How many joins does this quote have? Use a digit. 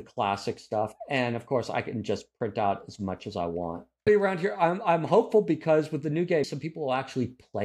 2